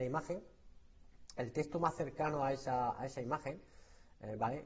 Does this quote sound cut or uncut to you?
uncut